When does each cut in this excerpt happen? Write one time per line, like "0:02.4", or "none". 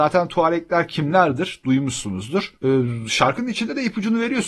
none